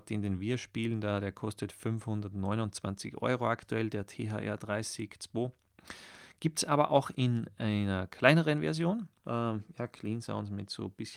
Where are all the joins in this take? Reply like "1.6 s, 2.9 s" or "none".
9.2 s